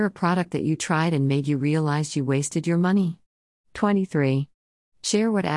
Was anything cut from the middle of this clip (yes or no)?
no